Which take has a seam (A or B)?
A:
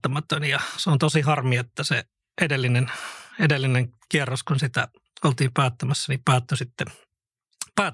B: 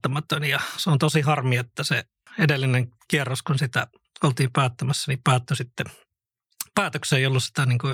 B